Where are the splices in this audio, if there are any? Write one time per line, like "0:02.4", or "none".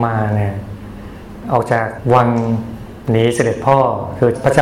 none